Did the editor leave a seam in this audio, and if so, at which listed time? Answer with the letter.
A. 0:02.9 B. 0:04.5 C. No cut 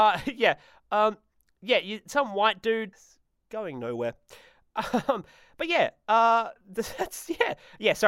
A